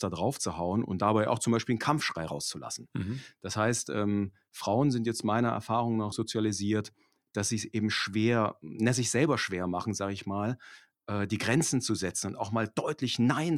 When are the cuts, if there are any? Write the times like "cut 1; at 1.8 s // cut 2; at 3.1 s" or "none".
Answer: cut 1; at 6.1 s